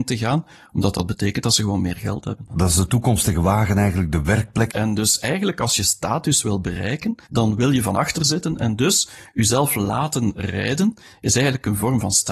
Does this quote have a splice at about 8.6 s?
no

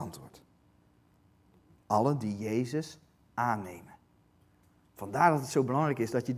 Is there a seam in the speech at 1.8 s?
no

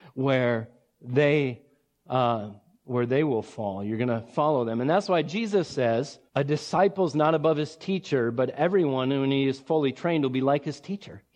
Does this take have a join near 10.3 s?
no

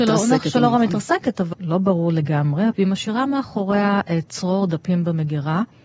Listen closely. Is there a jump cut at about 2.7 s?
yes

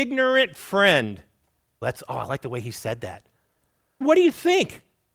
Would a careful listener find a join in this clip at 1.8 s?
yes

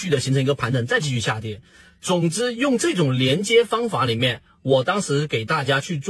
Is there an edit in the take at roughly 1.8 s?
no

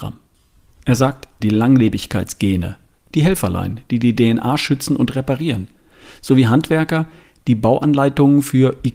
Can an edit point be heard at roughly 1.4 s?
yes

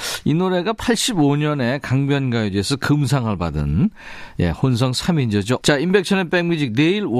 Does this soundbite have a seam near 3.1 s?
no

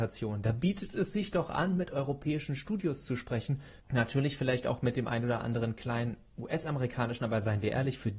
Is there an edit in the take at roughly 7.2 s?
no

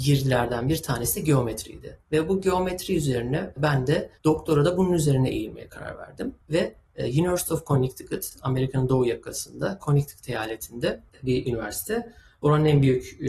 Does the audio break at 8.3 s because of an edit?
no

